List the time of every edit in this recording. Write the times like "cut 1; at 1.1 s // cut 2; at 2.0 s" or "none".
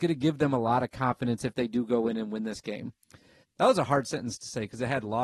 cut 1; at 3.4 s